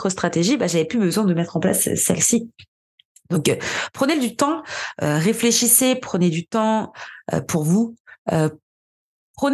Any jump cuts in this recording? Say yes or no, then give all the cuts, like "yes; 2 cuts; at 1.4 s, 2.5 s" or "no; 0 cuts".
no; 0 cuts